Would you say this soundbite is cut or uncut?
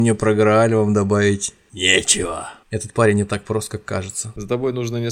cut